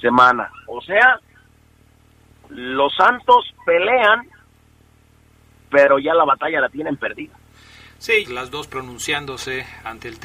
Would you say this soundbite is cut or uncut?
cut